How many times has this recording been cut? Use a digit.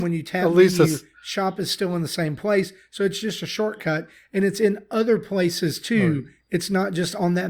0